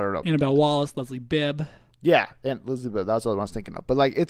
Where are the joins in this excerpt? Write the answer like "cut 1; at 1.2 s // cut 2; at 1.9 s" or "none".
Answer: none